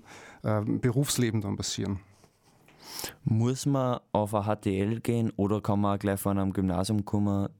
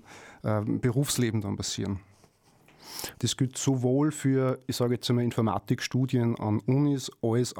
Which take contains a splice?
second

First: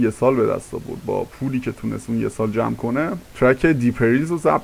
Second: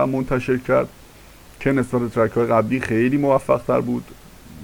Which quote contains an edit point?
first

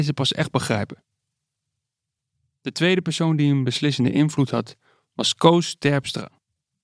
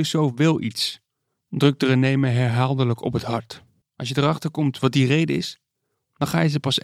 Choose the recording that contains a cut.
second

